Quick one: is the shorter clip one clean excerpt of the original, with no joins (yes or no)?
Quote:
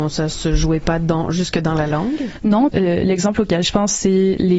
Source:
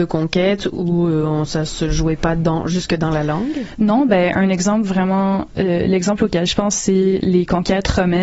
no